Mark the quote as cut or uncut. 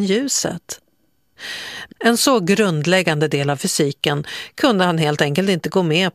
cut